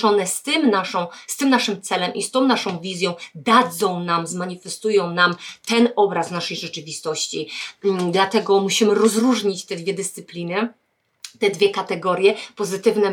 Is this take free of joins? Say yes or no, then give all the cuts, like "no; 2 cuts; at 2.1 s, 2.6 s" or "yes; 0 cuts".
yes; 0 cuts